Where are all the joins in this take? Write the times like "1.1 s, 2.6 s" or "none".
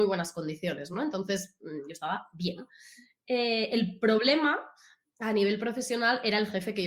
none